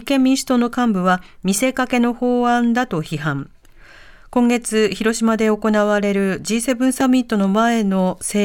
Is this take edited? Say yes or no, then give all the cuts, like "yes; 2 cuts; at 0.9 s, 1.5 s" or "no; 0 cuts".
no; 0 cuts